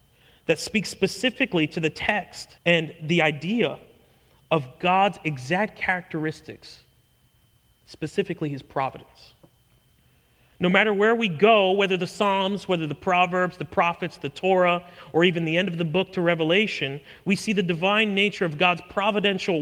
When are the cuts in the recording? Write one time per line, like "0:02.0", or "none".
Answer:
0:02.6